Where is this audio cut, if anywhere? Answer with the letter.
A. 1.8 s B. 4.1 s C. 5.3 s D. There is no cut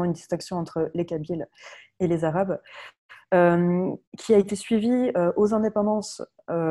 B